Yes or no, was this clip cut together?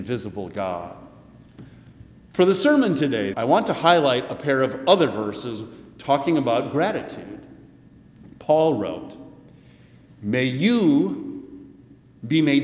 yes